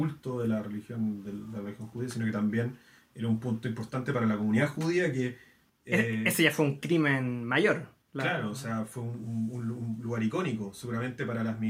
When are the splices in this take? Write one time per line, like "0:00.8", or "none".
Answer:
none